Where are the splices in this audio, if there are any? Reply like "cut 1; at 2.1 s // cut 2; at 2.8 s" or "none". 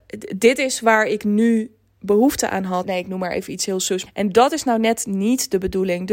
cut 1; at 2.8 s // cut 2; at 4.1 s

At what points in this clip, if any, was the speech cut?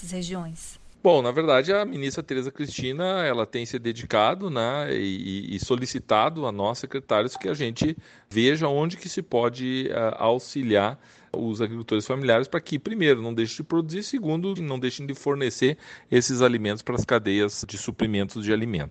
cut 1; at 14.6 s

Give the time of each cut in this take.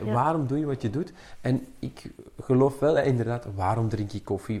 none

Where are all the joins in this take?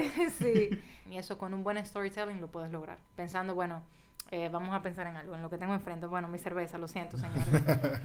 cut 1; at 1.1 s // cut 2; at 3.1 s

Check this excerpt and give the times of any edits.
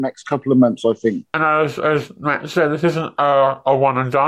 none

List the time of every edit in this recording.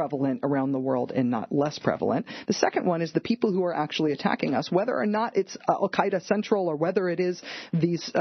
none

